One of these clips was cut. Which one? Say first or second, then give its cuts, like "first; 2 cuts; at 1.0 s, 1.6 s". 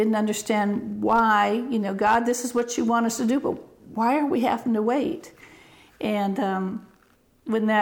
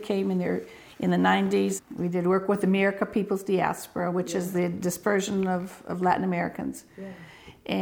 second; 1 cut; at 1.8 s